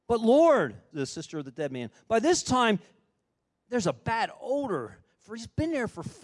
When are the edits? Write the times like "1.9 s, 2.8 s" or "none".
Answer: 0.9 s